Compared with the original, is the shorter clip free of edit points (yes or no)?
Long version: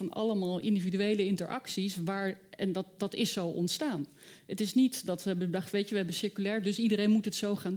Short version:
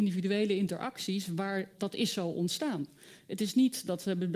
no